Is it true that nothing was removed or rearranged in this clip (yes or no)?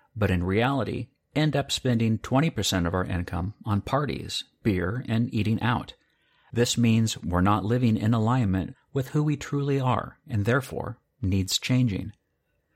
yes